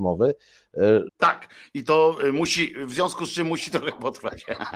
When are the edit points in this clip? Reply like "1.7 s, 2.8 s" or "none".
1.1 s